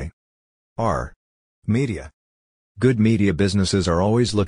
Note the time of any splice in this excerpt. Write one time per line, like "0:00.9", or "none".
0:01.6